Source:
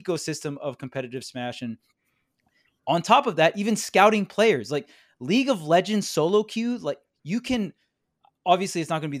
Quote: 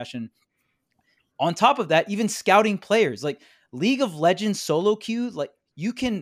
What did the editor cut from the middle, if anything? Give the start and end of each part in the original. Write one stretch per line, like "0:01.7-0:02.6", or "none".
none